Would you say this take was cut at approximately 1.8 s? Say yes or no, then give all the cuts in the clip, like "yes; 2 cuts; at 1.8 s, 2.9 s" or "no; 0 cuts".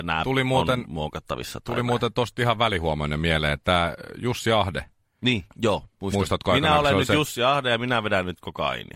no; 1 cut; at 5.5 s